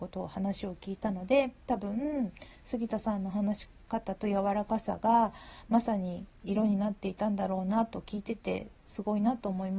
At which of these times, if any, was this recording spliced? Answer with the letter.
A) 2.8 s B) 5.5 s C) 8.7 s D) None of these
D